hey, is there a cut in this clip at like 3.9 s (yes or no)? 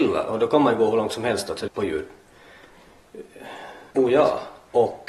yes